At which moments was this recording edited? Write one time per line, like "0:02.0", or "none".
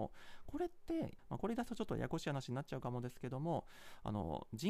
0:01.2